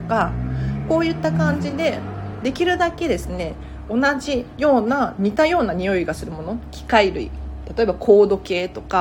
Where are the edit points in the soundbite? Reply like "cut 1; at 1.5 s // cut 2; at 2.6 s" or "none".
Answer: none